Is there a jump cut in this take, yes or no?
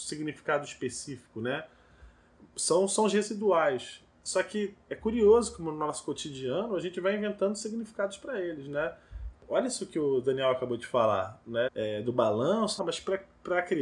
yes